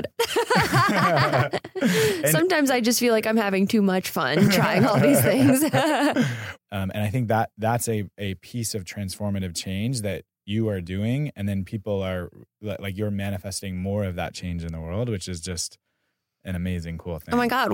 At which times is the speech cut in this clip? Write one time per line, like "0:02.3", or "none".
0:06.5